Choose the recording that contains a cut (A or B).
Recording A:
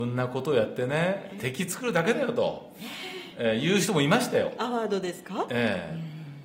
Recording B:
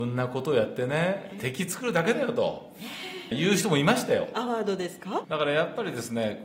B